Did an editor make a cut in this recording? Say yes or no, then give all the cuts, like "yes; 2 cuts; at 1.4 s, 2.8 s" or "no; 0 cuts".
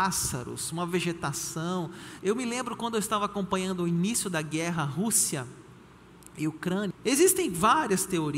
yes; 2 cuts; at 2.2 s, 6.9 s